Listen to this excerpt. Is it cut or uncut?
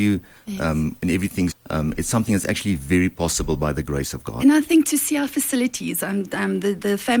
cut